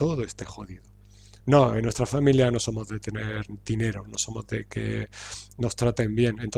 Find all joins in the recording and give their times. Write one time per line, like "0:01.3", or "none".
0:01.4
0:04.0